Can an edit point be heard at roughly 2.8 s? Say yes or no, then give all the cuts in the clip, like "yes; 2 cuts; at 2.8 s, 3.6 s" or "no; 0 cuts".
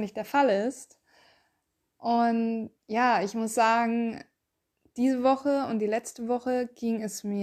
yes; 1 cut; at 2.8 s